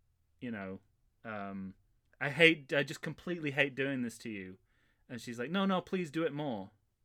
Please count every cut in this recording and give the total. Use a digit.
0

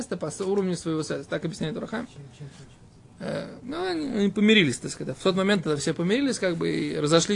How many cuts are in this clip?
0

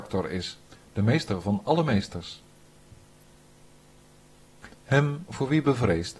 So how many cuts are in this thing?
1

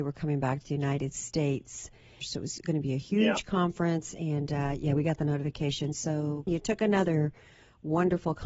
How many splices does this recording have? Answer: 2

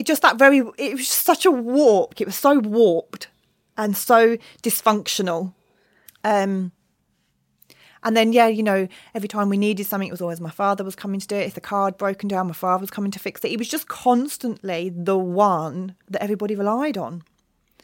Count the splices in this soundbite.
2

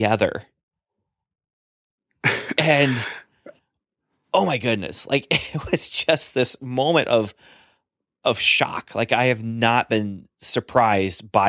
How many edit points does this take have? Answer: 0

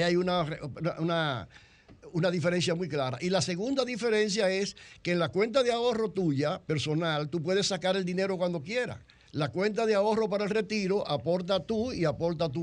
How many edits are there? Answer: 1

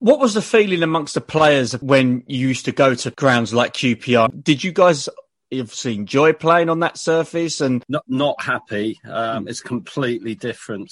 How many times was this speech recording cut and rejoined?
1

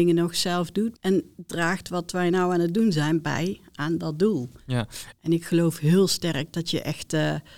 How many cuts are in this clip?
2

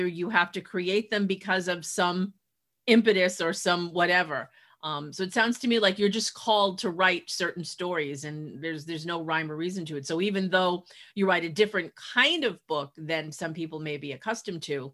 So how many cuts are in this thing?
0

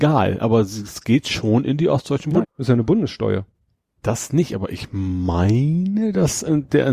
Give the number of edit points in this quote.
2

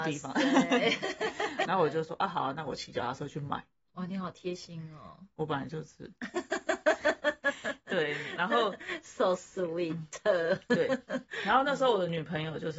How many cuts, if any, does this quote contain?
1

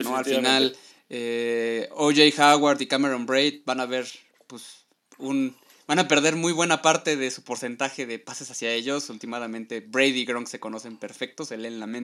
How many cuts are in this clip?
0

